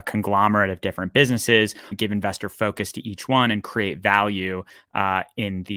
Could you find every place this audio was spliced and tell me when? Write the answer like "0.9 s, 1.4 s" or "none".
1.9 s